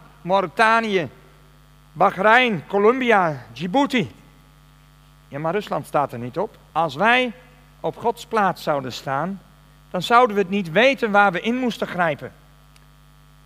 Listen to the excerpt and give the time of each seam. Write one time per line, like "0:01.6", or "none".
0:06.7